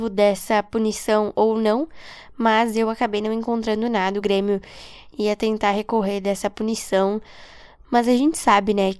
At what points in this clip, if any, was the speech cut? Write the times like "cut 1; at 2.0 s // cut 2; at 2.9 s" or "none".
none